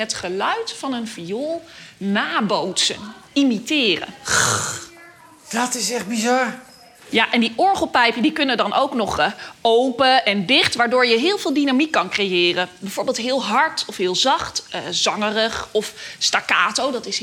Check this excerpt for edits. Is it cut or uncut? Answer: uncut